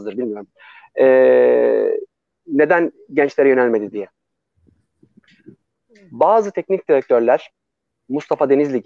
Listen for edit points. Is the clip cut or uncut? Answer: uncut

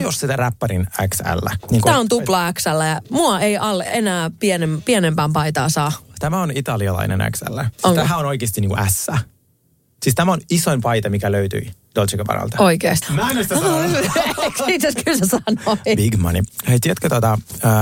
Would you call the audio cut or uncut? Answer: cut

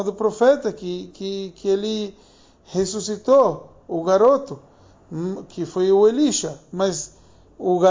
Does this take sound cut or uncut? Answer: uncut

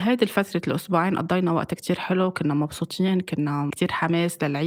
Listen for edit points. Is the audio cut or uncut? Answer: uncut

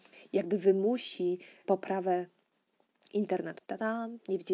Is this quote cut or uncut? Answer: cut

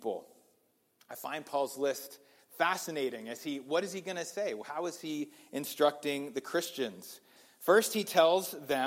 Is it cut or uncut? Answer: uncut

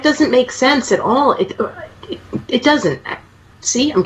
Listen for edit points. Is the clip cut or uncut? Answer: uncut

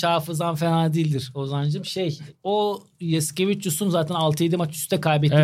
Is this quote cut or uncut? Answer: uncut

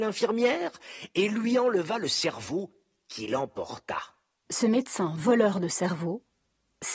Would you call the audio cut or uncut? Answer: uncut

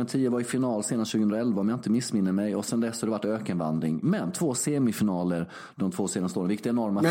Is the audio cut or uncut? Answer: uncut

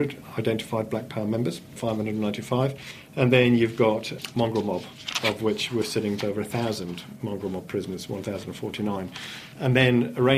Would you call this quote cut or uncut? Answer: cut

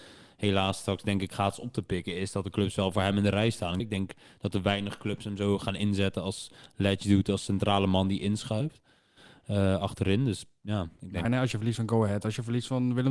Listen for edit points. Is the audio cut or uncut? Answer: cut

